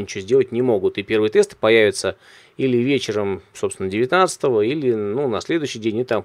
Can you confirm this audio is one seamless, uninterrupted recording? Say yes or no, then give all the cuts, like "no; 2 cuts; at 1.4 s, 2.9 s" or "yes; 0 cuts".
yes; 0 cuts